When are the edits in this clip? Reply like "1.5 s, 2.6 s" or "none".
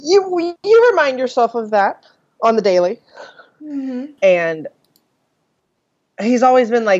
4.2 s